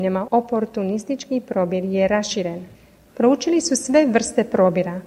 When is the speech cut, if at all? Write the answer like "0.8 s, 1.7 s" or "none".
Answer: 3.1 s